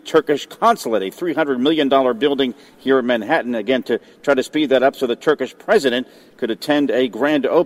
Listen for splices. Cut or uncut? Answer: uncut